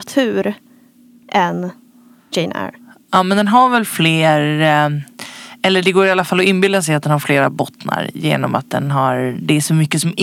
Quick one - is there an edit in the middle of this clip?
no; 0 cuts

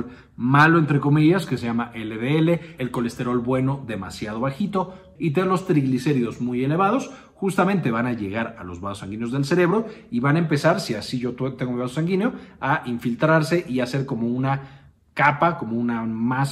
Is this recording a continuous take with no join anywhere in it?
no; 2 cuts; at 2.8 s, 5.2 s

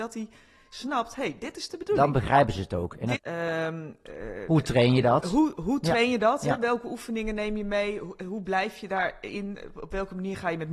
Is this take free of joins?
no; 1 cut; at 3.2 s

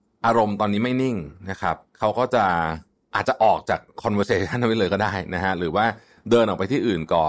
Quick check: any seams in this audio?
yes; 1 cut; at 1.9 s

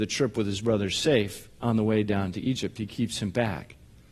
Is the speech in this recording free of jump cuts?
yes; 0 cuts

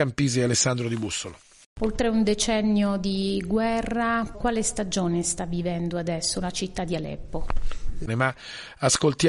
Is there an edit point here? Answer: yes; 2 cuts; at 4.3 s, 8.1 s

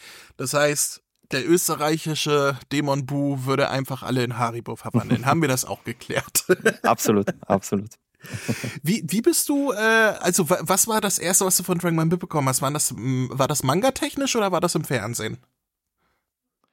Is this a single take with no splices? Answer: yes; 0 cuts

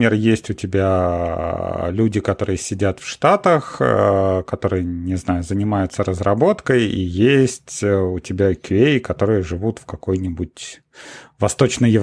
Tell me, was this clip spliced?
no; 0 cuts

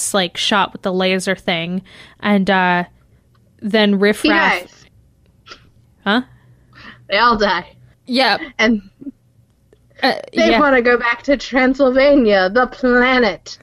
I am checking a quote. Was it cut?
yes; 1 cut; at 7.9 s

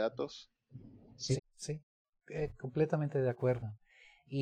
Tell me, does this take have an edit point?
yes; 1 cut; at 1.4 s

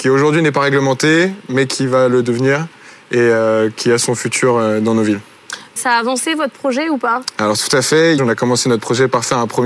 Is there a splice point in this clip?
yes; 2 cuts; at 5.8 s, 8.2 s

